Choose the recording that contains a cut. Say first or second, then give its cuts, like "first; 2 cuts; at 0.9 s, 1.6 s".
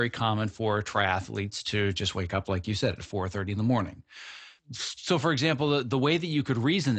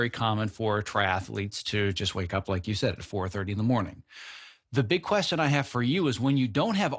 first; 1 cut; at 4.6 s